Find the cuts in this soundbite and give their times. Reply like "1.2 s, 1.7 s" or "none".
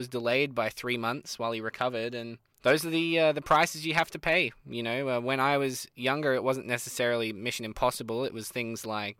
none